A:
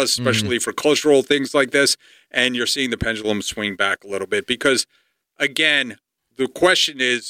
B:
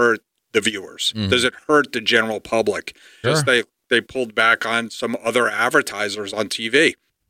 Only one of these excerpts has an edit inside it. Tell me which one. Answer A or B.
B